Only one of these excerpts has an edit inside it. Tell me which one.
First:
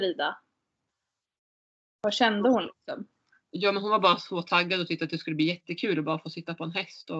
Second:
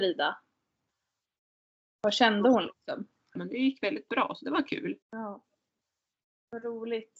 second; 2 cuts; at 3.4 s, 5.0 s

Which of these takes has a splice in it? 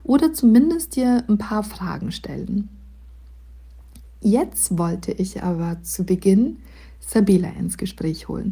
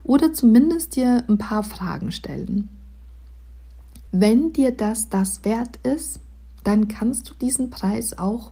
second; 1 cut; at 4.1 s

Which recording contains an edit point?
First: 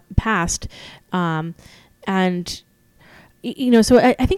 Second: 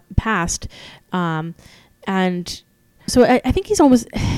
second; 1 cut; at 3.1 s

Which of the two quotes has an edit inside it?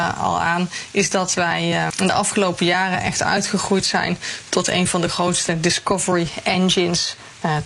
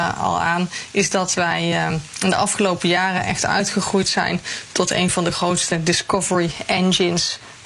first; 1 cut; at 1.9 s

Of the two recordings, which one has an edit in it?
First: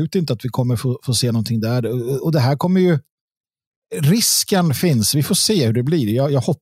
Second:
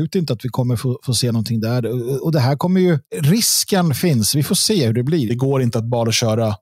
second; 2 cuts; at 3.1 s, 5.3 s

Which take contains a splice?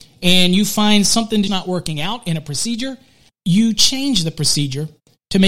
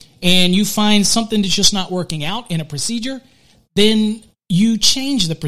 first; 2 cuts; at 1.5 s, 3.3 s

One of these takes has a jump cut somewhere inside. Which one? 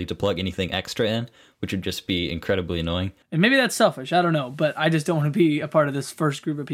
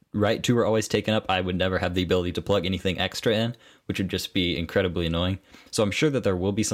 first; 1 cut; at 3.2 s

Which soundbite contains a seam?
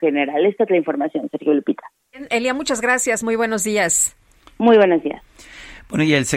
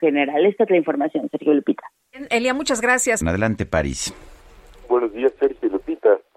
second; 1 cut; at 3.2 s

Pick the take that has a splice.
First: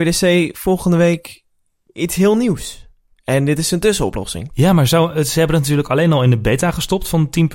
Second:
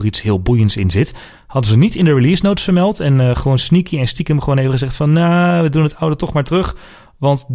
first; 1 cut; at 4.5 s

